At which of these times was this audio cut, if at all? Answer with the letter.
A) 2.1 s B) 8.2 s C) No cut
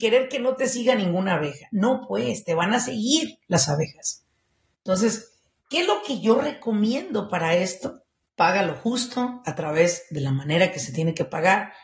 B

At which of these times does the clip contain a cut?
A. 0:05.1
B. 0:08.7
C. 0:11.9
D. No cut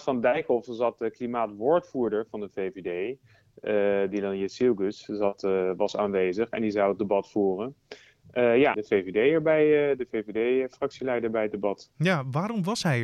B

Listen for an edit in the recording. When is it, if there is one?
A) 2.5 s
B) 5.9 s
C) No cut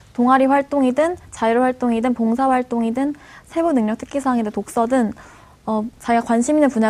B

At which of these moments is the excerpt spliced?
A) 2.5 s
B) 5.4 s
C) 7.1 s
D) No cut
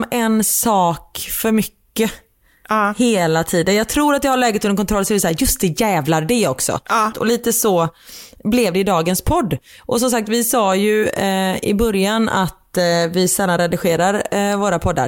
C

